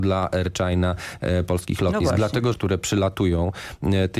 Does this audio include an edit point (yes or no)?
yes